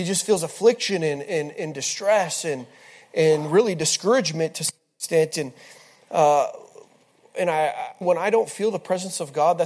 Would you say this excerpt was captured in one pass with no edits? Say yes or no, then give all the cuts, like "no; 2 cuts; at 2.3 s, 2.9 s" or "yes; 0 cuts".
no; 1 cut; at 8.0 s